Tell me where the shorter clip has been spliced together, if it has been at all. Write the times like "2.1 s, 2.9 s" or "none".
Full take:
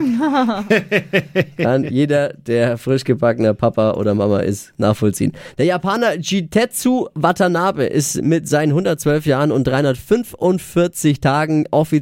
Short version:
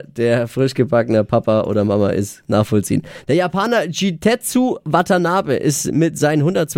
none